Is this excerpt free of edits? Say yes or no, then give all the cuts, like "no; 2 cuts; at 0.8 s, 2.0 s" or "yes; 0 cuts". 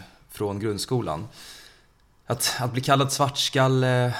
yes; 0 cuts